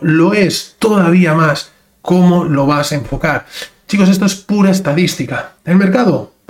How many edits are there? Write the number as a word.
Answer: zero